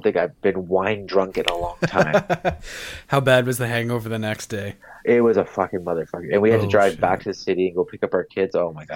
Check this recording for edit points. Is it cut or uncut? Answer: uncut